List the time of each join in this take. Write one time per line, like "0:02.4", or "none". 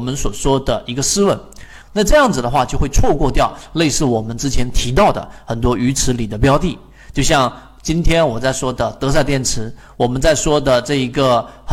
0:01.8